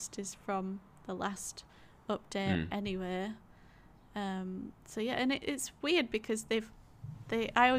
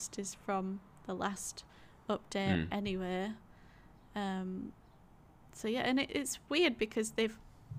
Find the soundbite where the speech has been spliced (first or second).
first